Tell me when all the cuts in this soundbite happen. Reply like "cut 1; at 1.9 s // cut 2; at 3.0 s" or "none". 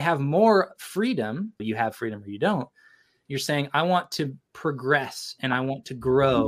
cut 1; at 1.6 s // cut 2; at 3.3 s